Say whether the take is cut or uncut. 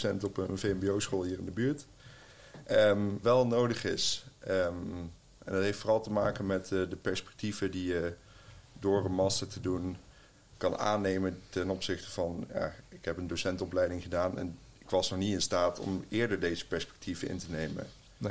cut